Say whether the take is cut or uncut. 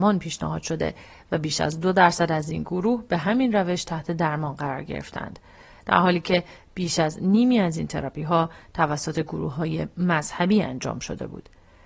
uncut